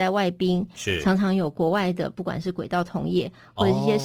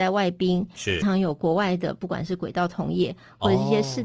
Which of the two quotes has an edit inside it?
second; 1 cut; at 1.0 s

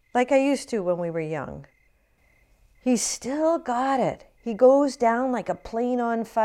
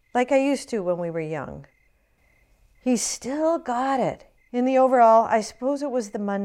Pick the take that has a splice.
second; 1 cut; at 4.4 s

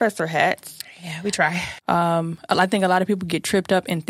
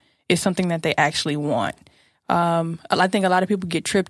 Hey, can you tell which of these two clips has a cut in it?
first; 1 cut; at 1.8 s

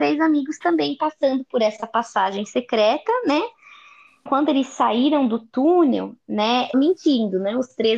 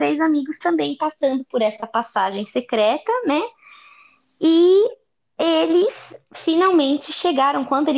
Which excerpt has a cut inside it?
first; 2 cuts; at 4.3 s, 6.7 s

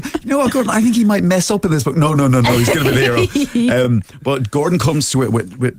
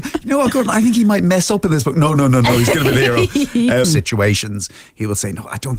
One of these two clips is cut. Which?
second; 1 cut; at 3.8 s

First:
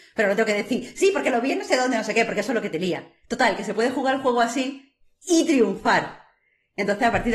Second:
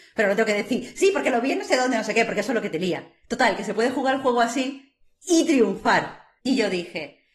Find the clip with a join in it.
second; 1 cut; at 6.4 s

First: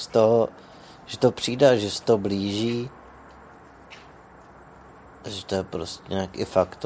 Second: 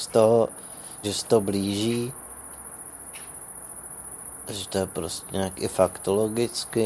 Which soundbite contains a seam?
second; 1 cut; at 1.0 s

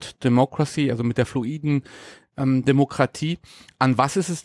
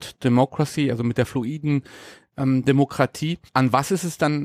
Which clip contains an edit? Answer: second; 1 cut; at 3.5 s

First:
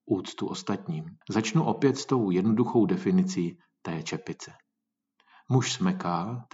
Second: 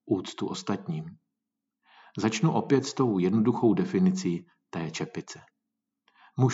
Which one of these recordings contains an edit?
first; 1 cut; at 1.2 s

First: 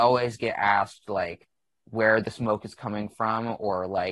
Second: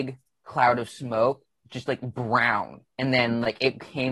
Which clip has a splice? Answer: second; 1 cut; at 2.9 s

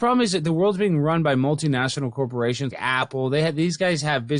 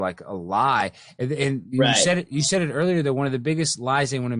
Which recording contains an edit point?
first; 1 cut; at 2.7 s

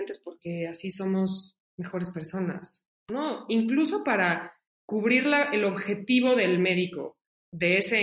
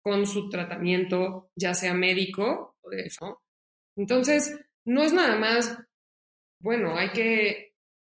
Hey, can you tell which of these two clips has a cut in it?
second; 1 cut; at 3.2 s

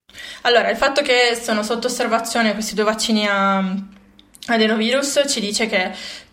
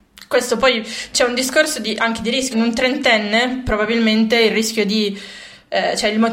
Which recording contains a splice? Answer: second; 1 cut; at 2.5 s

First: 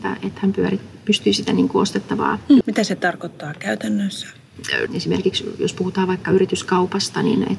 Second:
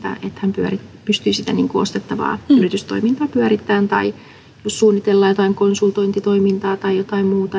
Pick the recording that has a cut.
first; 2 cuts; at 2.6 s, 4.9 s

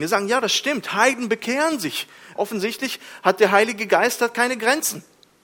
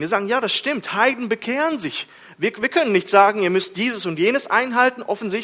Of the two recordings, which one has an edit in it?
first; 1 cut; at 2.4 s

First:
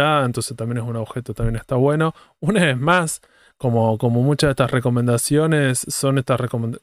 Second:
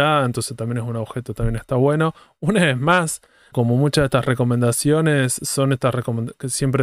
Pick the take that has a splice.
second; 1 cut; at 3.5 s

